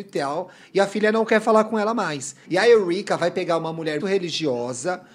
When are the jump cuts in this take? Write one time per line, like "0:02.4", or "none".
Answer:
0:02.4
0:04.0